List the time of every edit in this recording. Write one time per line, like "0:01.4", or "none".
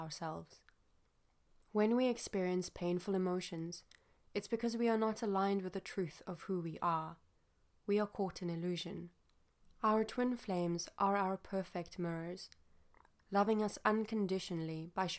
0:09.6